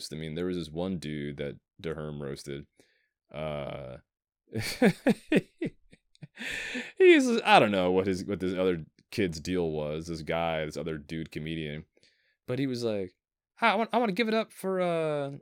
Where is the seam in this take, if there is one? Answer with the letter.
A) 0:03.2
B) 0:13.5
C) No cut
C